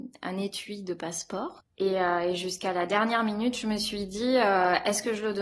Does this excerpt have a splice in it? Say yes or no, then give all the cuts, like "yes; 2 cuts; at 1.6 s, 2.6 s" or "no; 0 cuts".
yes; 1 cut; at 1.6 s